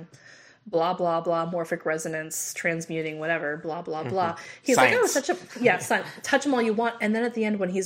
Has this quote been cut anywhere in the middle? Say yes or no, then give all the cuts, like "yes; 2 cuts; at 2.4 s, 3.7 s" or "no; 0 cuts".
no; 0 cuts